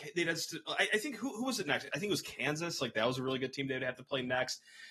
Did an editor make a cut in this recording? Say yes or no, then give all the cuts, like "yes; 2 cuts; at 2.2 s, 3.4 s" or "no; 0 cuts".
no; 0 cuts